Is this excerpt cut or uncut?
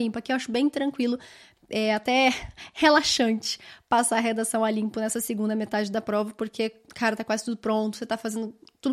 uncut